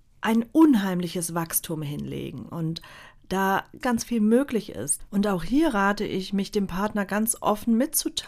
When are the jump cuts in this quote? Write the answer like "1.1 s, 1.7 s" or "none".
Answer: 3.8 s, 5.1 s